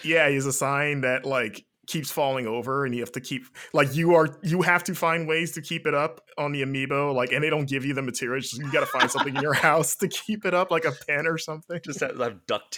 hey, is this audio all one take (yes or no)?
no